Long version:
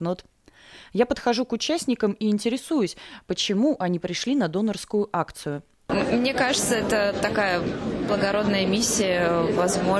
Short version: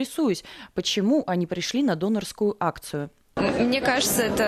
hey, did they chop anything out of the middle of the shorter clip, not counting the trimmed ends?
no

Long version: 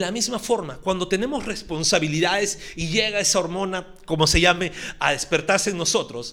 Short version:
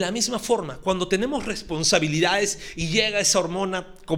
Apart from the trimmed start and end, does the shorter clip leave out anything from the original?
no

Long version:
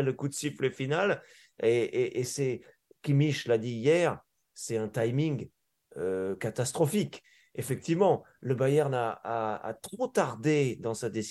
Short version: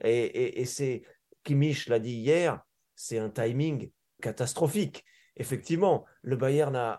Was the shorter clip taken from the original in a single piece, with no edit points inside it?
no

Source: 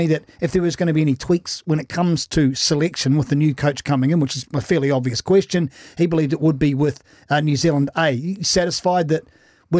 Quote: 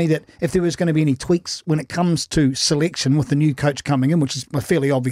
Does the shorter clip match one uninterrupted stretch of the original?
yes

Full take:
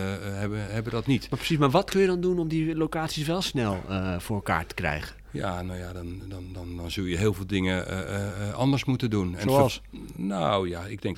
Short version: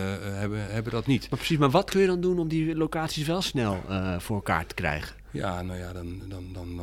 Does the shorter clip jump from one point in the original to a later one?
no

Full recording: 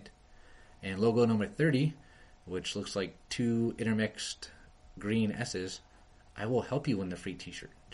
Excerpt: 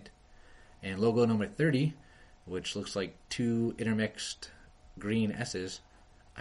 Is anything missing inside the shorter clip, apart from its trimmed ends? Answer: no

